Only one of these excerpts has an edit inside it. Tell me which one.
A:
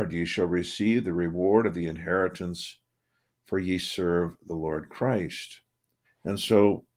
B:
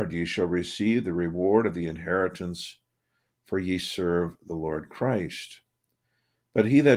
A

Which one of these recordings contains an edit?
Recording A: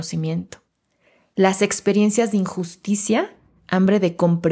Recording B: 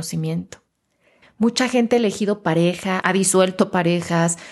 B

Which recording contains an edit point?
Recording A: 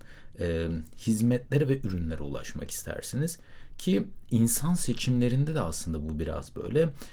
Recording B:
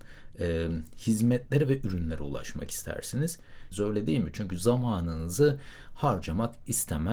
B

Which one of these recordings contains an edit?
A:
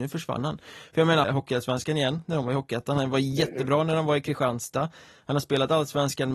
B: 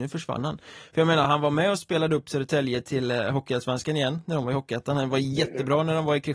A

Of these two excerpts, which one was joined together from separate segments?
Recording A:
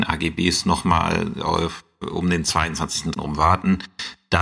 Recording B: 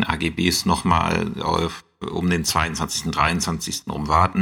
A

